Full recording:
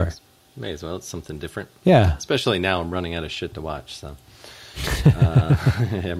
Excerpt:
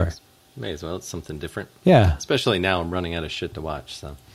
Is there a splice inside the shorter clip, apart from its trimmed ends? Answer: no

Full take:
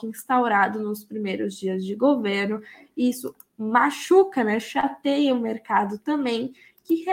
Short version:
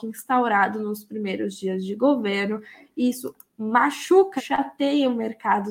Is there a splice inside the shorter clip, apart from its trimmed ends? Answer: yes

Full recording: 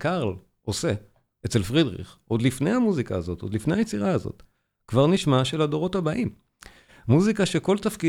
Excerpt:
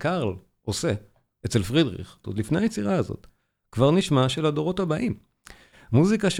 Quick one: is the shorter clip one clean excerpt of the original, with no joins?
no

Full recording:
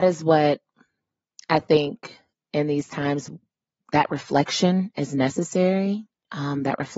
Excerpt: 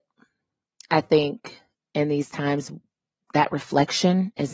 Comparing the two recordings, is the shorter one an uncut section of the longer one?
yes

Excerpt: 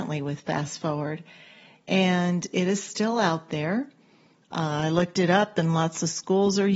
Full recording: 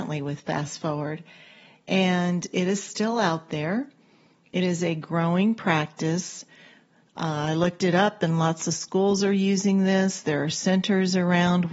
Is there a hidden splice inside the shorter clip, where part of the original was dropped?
yes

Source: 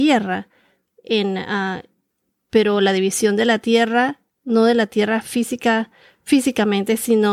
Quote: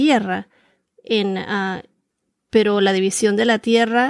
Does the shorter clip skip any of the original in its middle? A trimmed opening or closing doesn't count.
no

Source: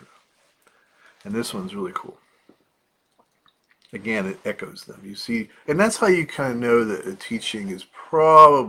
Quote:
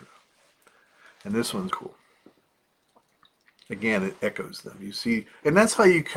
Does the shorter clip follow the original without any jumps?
no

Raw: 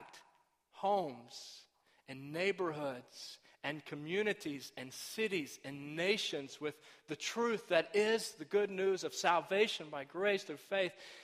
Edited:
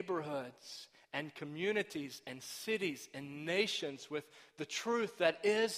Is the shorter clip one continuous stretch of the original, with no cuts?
yes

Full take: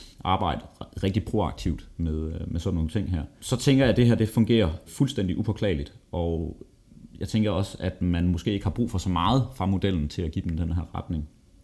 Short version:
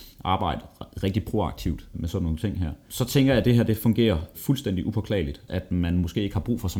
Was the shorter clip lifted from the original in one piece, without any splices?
no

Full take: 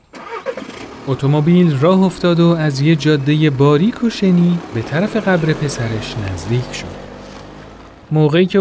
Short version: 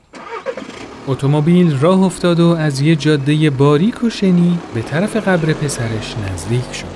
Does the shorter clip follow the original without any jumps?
yes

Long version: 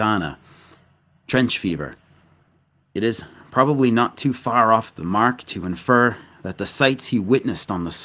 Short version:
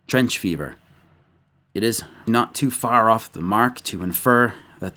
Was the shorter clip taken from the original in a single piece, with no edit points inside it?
no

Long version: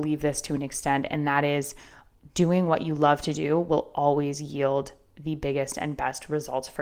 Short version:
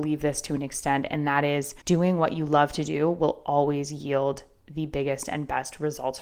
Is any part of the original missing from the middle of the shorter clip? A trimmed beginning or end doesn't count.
yes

